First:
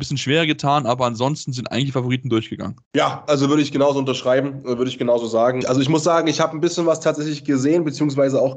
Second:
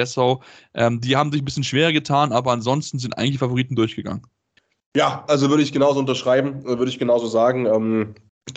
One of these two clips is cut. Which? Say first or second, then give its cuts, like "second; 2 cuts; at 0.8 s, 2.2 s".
first; 2 cuts; at 2.8 s, 5.6 s